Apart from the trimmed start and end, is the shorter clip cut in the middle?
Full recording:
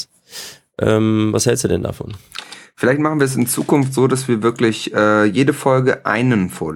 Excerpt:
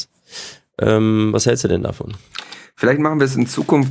no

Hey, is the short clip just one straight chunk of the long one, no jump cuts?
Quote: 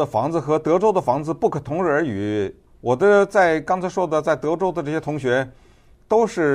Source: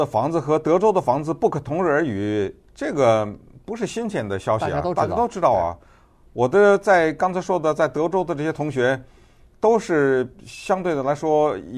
no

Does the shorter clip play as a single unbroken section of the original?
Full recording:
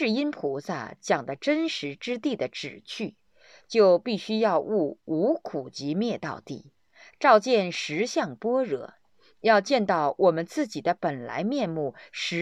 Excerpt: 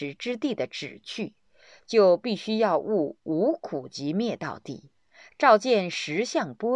yes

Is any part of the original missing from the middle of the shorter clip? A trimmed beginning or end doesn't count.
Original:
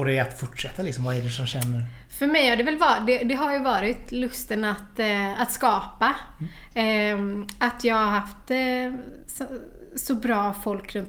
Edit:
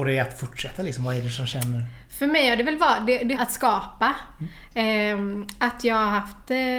yes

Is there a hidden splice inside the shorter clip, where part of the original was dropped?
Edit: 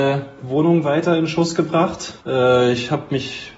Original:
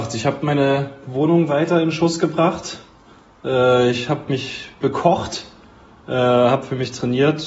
yes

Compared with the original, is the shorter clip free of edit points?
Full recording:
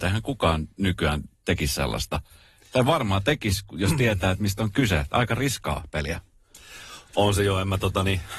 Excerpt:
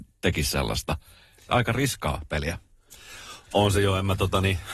no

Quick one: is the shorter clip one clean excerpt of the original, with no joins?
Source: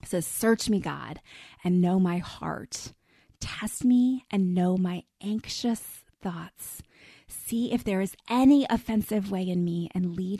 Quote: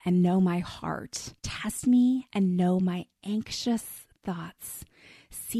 no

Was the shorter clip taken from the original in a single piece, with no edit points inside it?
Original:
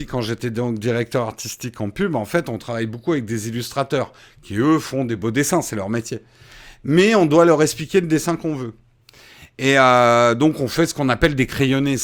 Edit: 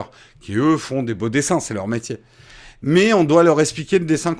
yes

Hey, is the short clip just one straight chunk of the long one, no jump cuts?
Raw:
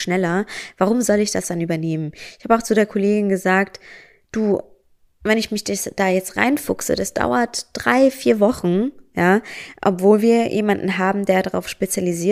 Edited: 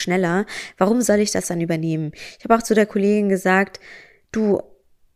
yes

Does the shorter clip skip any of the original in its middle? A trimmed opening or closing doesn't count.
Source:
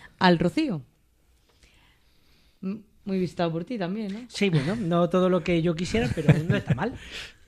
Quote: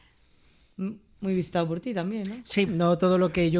yes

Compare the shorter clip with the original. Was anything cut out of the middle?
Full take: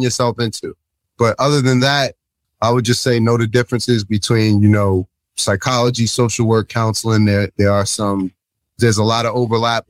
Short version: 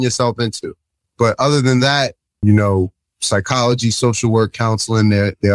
yes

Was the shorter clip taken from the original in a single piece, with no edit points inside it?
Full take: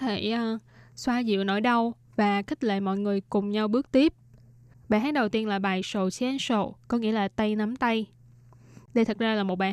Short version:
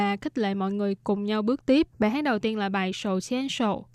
no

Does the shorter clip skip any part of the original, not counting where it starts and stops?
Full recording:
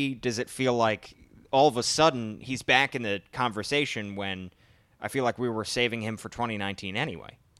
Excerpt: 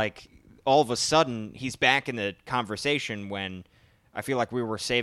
no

